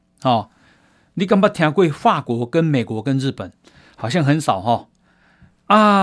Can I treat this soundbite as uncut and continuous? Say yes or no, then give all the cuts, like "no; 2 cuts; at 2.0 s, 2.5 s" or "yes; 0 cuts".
yes; 0 cuts